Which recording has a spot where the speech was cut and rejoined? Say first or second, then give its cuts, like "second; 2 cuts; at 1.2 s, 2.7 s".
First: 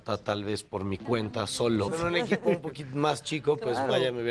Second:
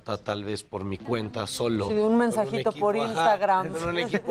first; 1 cut; at 1.9 s